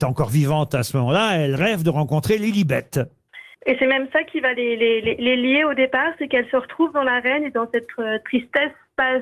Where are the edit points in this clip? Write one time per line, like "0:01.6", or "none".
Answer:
0:03.5